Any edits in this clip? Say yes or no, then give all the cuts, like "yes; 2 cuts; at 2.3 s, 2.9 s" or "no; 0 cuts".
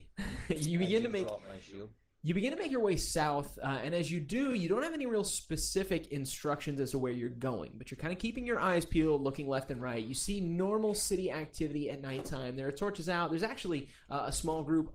no; 0 cuts